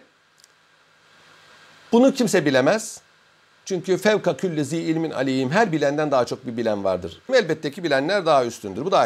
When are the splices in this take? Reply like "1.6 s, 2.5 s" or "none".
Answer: 7.3 s